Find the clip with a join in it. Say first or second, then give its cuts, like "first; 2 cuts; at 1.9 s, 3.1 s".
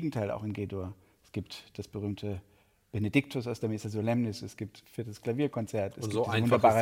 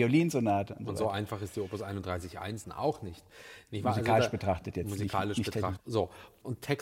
second; 2 cuts; at 2.6 s, 5.8 s